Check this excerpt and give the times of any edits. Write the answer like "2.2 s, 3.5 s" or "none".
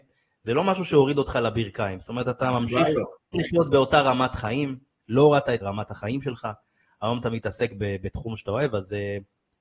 3.3 s, 5.6 s